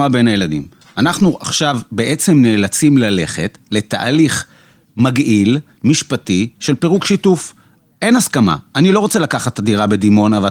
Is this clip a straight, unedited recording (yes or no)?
yes